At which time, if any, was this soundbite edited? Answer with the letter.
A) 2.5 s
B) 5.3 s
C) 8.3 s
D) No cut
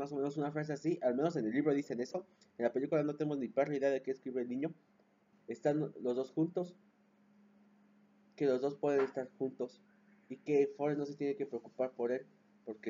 B